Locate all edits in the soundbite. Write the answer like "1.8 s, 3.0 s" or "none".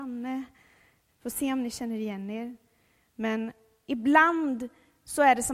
1.1 s